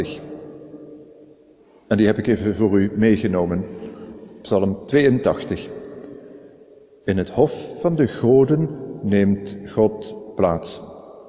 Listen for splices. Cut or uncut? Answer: uncut